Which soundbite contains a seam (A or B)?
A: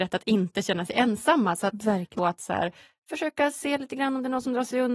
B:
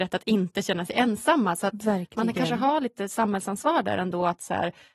A